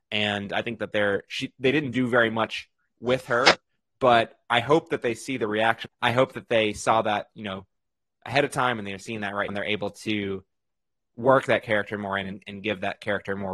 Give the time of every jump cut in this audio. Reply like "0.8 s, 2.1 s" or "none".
3.8 s, 5.8 s, 9.5 s

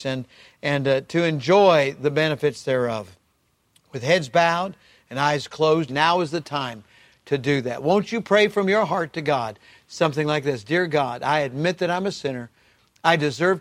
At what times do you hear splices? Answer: 5.9 s

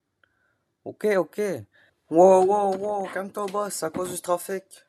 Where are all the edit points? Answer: 1.9 s

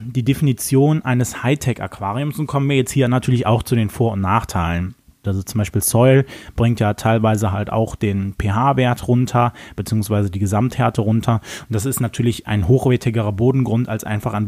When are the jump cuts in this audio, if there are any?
5.2 s

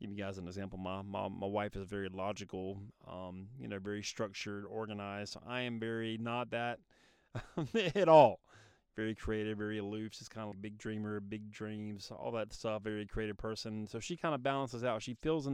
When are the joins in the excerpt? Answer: 10.5 s

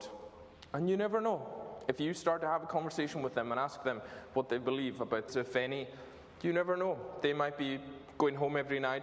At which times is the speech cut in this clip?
5.3 s

